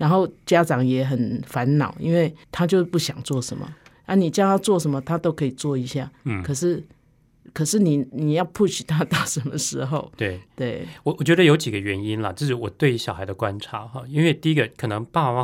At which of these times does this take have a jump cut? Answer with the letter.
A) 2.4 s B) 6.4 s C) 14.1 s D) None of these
A